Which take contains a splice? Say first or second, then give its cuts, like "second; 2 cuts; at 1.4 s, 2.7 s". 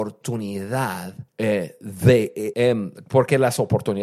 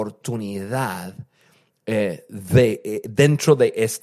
first; 2 cuts; at 1.3 s, 2.5 s